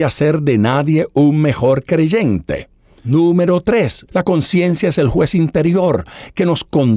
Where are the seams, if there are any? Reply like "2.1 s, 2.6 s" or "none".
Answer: 4.1 s